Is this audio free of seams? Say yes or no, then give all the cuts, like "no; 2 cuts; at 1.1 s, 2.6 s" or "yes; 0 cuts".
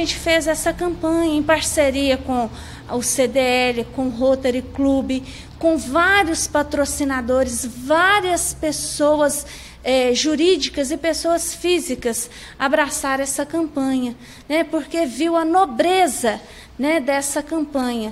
yes; 0 cuts